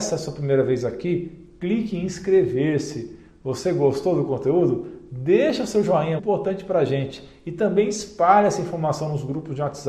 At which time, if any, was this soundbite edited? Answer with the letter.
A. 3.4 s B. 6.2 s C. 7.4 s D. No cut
B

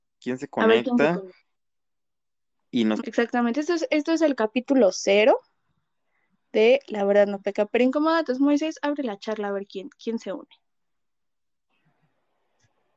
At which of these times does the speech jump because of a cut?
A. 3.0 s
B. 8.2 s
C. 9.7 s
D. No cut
A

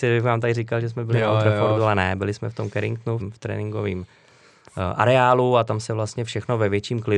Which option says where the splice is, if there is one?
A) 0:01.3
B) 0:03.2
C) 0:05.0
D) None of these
B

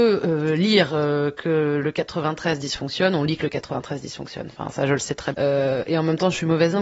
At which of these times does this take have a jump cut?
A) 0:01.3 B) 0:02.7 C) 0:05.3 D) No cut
C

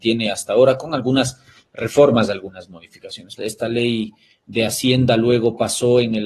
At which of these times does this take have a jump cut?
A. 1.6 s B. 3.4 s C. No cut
B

